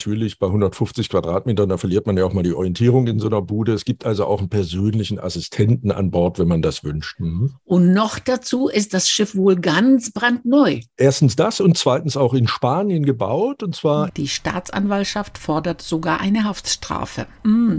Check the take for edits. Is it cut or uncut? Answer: cut